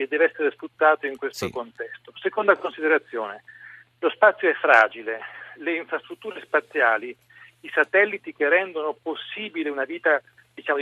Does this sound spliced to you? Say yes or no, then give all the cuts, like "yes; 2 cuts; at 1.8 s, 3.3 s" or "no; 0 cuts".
no; 0 cuts